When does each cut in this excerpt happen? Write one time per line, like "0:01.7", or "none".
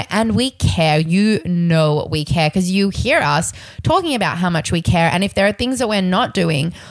none